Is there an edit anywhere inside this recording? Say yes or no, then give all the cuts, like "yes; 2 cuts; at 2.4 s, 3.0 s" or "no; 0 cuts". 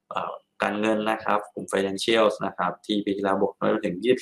no; 0 cuts